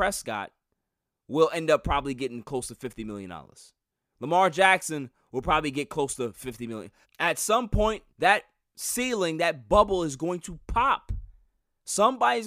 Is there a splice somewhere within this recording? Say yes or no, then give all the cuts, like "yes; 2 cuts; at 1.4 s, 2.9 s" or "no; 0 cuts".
yes; 2 cuts; at 7.0 s, 8.1 s